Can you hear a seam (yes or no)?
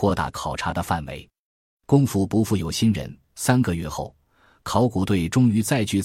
no